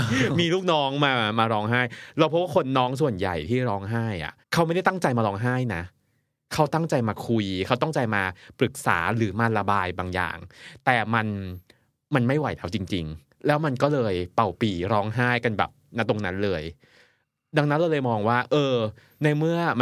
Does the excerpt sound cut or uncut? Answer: cut